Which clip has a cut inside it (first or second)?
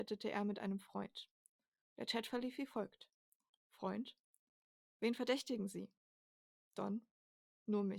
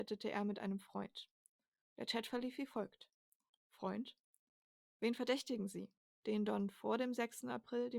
second